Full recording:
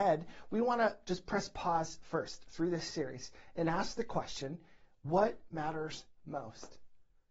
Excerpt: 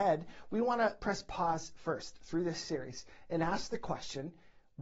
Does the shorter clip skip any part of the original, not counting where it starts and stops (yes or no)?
yes